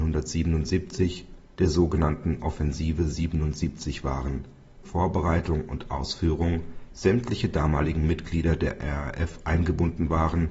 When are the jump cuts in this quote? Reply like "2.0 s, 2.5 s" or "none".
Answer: 4.8 s